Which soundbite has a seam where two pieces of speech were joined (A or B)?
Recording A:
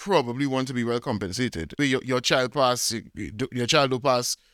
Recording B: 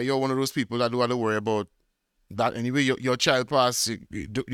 A